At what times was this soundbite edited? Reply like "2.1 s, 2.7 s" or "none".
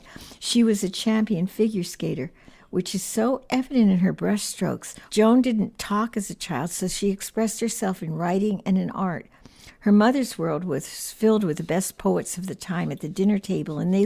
5.1 s